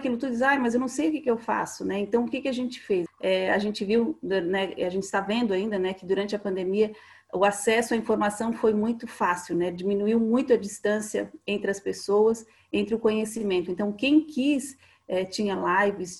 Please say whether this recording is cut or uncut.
cut